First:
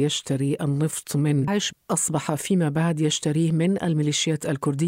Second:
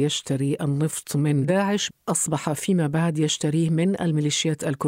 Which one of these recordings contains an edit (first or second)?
first